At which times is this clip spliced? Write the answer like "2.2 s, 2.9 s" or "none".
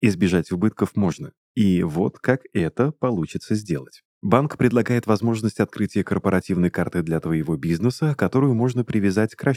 4.1 s